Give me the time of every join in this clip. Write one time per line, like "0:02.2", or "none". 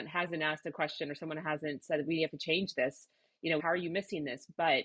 0:03.6